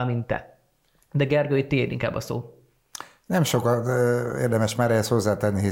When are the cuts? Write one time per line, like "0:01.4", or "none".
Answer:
none